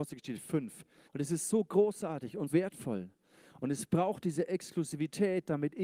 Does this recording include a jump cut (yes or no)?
yes